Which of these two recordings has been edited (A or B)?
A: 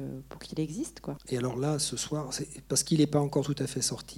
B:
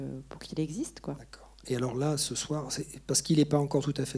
A